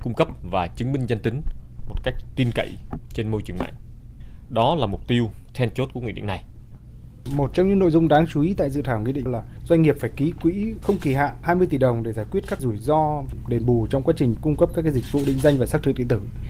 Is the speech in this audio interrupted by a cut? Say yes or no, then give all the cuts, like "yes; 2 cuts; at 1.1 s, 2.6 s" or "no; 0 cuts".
no; 0 cuts